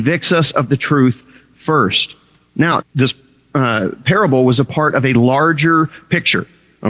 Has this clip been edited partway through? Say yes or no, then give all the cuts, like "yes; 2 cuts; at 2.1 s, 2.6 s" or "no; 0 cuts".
yes; 1 cut; at 2.8 s